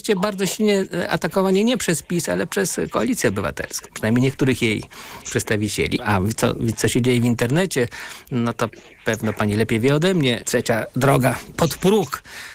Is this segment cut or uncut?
cut